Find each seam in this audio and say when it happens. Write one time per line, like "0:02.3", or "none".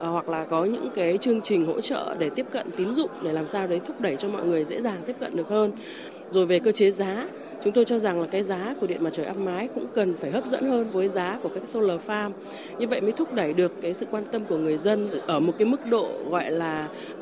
0:10.9